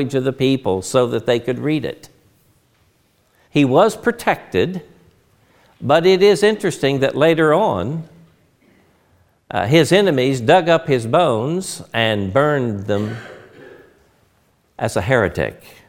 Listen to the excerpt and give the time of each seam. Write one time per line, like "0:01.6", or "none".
0:03.4